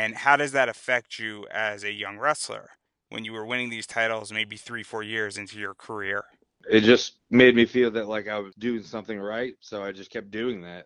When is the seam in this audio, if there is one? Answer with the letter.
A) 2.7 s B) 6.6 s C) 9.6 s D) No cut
D